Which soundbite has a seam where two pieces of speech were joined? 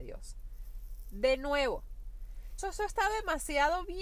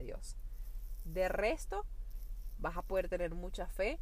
first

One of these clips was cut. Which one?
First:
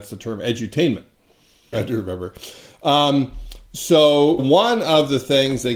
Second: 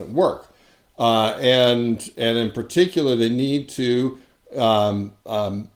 first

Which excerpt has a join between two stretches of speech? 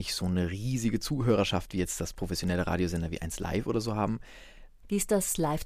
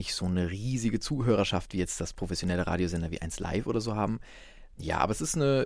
first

